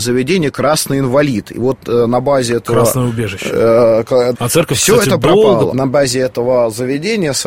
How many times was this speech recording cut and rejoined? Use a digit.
2